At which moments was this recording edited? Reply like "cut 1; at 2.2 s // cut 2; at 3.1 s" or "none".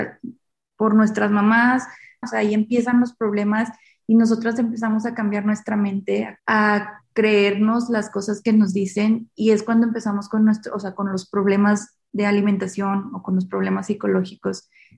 cut 1; at 2.2 s // cut 2; at 6.4 s